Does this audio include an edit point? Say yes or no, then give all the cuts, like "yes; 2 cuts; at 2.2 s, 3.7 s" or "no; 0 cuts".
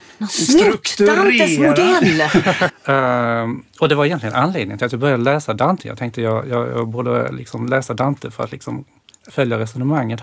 yes; 2 cuts; at 2.7 s, 9.3 s